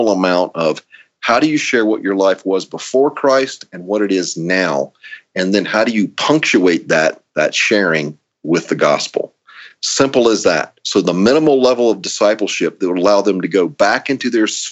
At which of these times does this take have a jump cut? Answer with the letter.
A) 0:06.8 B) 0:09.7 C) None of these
C